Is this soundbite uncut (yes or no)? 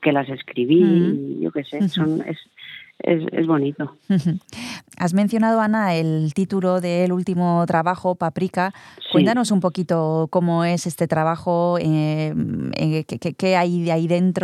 yes